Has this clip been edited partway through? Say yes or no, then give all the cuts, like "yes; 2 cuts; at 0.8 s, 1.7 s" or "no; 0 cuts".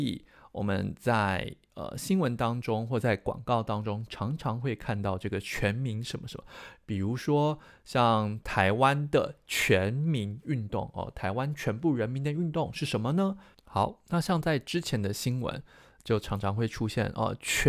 yes; 1 cut; at 13.5 s